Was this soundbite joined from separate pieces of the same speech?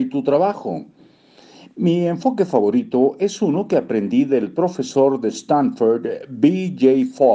no; 0 cuts

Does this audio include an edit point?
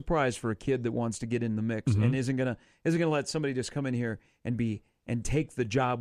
no; 0 cuts

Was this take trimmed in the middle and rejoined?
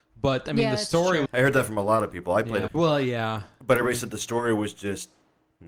yes; 2 cuts; at 1.3 s, 2.7 s

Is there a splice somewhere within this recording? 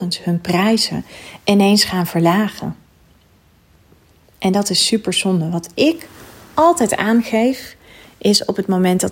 no; 0 cuts

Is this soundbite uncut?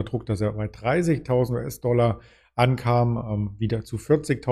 yes; 0 cuts

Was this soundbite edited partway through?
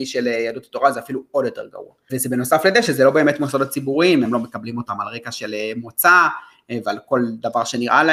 yes; 2 cuts; at 2.1 s, 4.2 s

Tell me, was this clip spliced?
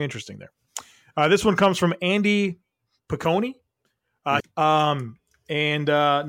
yes; 1 cut; at 4.4 s

